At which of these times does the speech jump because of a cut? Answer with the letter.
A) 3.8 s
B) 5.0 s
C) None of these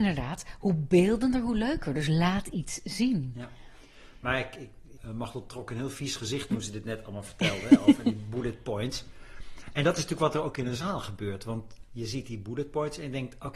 B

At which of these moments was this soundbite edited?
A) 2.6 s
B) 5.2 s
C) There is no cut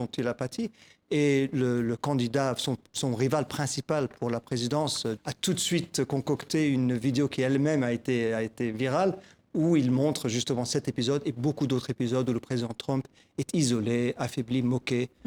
B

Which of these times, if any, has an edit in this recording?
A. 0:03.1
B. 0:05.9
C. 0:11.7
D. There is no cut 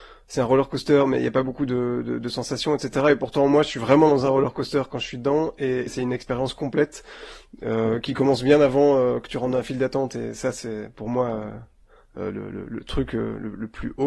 B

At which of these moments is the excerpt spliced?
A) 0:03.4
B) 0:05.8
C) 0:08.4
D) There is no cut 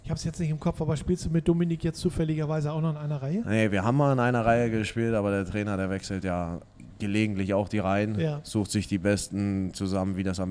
D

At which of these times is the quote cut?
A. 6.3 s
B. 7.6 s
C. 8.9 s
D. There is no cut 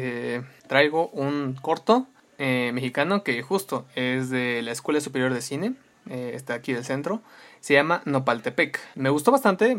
D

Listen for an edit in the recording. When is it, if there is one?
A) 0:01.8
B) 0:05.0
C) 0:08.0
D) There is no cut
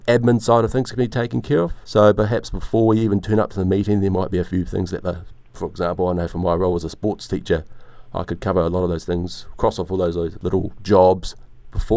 D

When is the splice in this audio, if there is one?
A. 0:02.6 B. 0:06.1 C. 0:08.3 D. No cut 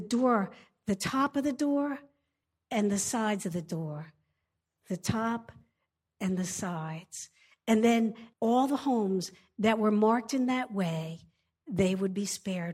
C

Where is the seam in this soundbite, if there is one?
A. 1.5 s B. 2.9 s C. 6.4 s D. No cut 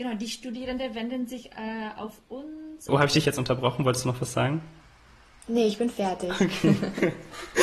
B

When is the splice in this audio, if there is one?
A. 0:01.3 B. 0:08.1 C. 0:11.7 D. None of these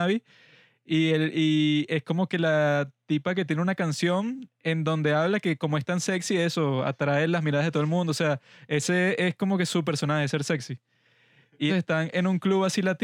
C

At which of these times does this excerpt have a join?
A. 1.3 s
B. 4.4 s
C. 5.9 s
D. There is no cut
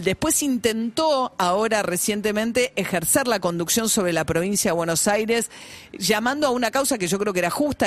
D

